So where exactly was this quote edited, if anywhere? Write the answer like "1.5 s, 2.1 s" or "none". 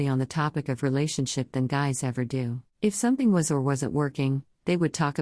2.7 s